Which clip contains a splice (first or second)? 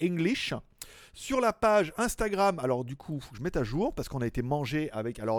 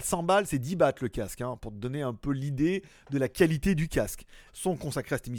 second